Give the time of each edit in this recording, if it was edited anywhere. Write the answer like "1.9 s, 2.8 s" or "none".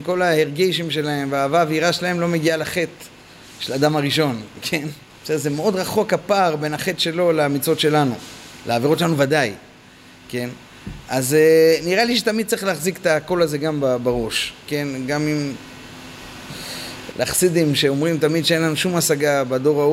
5.1 s, 17.1 s